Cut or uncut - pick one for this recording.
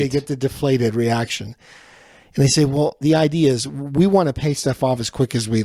uncut